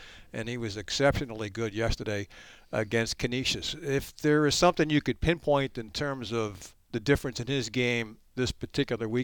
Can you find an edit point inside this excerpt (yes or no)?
no